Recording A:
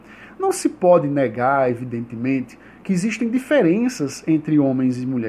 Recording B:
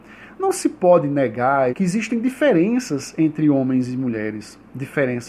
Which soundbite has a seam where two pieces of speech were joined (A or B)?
B